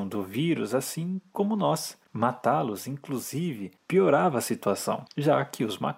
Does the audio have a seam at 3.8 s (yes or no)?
no